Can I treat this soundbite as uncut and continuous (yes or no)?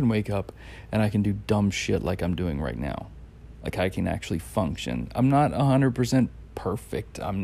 yes